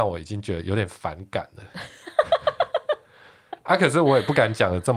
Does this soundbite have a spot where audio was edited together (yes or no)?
no